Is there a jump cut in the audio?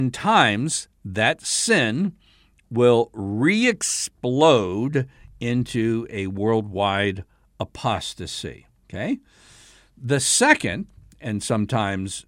no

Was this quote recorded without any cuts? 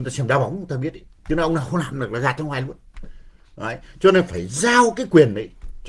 yes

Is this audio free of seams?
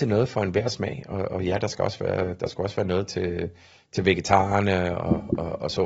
yes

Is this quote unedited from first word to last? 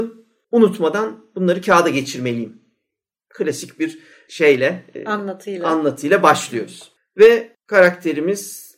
yes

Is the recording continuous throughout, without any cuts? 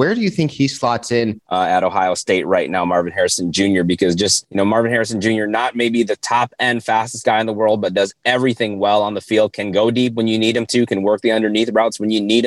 no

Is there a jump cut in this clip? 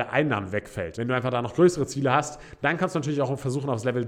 yes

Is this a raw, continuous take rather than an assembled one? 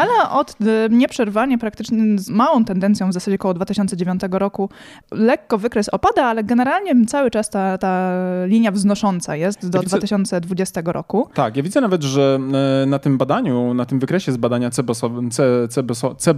no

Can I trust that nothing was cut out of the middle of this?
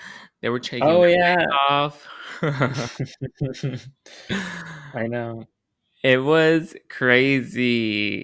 yes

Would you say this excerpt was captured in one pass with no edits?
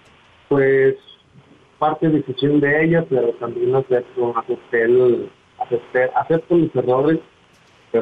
yes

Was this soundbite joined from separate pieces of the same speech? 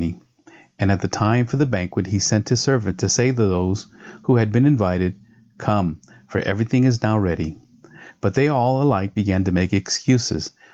no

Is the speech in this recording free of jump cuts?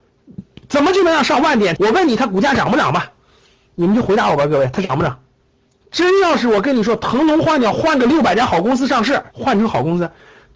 no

